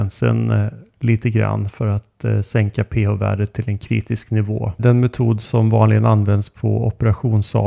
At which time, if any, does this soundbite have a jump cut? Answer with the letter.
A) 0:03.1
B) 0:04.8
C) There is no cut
B